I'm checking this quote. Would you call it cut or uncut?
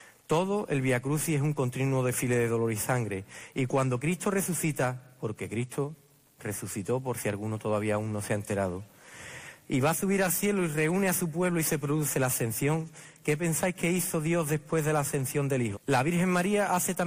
cut